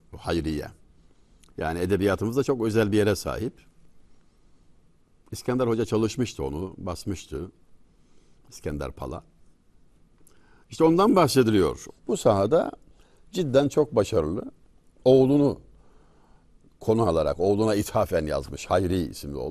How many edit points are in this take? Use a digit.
1